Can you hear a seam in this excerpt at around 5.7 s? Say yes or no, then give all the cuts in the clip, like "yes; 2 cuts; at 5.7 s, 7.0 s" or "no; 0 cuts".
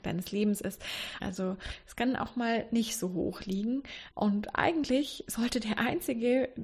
no; 2 cuts; at 1.2 s, 4.1 s